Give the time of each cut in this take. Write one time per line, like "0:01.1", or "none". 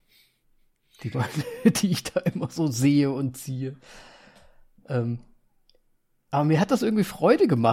none